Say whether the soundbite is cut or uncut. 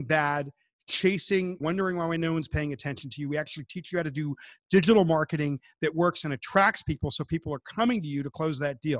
cut